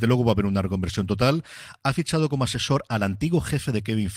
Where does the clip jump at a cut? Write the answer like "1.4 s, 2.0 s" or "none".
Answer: none